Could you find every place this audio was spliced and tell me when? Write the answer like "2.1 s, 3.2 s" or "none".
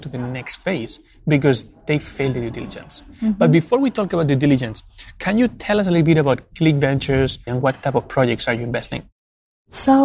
7.5 s